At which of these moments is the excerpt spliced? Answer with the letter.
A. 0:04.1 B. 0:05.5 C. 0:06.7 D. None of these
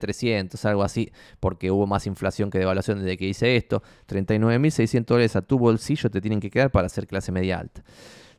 A